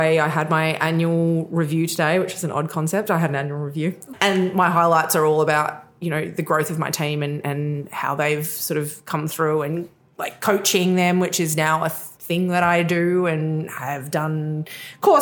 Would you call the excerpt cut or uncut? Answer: uncut